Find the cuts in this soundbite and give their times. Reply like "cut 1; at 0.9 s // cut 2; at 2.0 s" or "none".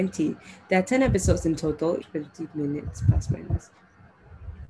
cut 1; at 2.0 s